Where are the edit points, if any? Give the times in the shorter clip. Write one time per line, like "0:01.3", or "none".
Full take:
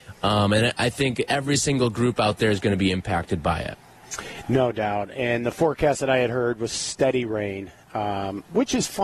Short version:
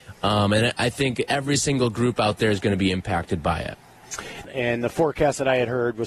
0:04.4